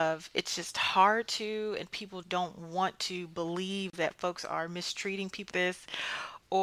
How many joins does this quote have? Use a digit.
2